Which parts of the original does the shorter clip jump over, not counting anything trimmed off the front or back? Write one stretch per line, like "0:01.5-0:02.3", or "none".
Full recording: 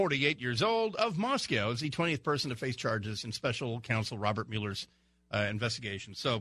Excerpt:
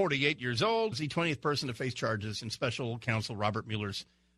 0:00.9-0:01.7